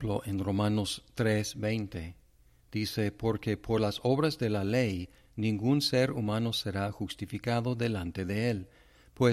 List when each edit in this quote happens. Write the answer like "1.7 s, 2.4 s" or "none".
none